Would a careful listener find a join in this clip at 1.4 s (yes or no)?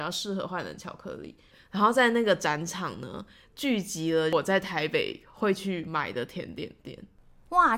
no